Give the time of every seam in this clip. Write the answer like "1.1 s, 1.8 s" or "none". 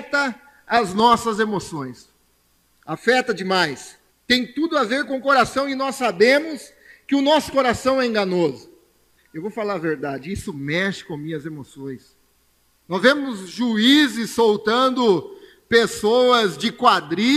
4.1 s, 9.2 s, 12.7 s